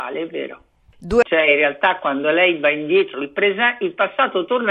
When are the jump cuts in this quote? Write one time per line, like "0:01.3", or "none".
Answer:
0:01.2
0:03.1